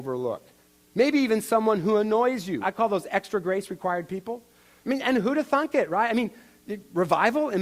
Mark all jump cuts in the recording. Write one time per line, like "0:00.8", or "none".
0:02.6
0:04.8

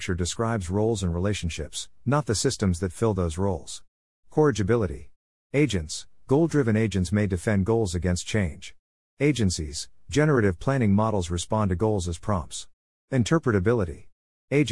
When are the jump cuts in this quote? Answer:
0:04.1

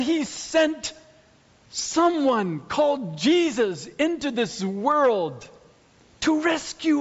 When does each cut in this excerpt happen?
none

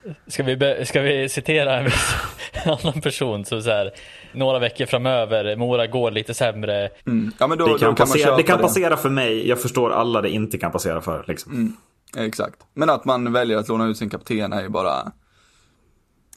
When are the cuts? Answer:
0:04.3
0:07.0

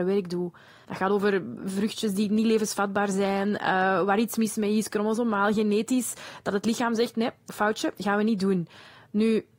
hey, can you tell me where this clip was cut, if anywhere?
none

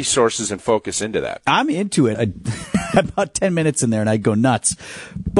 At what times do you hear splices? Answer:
0:02.1

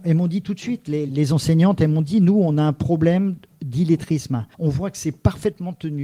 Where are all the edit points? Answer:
0:01.1
0:04.5

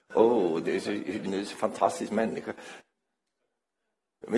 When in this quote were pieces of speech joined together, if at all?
0:01.3

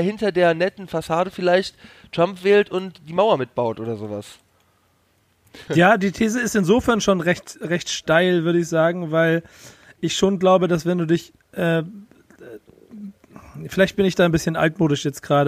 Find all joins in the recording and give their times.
0:05.7

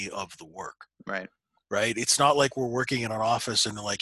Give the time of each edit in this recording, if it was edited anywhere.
none

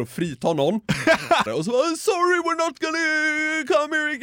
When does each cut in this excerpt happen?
0:01.5

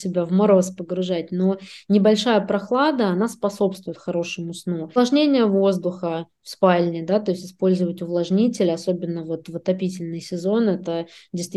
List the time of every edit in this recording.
none

